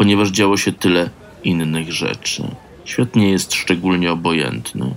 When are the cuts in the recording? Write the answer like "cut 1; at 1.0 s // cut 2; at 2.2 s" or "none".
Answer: none